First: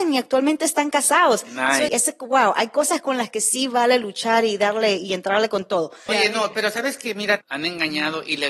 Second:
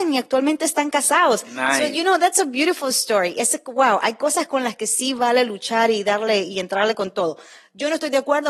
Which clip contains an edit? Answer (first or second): first